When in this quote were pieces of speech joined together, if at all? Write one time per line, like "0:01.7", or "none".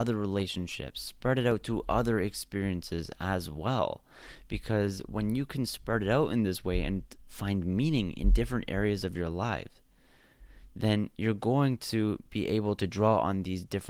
none